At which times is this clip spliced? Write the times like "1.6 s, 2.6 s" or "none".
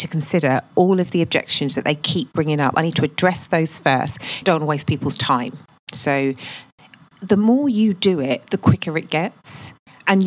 4.4 s, 5.9 s